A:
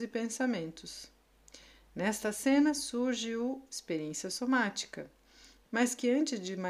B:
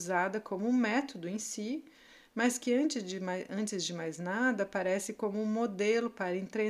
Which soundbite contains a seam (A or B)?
A